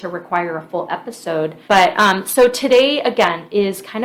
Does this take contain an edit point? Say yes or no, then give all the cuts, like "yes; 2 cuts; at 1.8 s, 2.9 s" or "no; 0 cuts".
yes; 1 cut; at 1.7 s